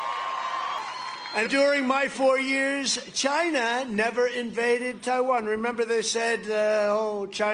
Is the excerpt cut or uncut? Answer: cut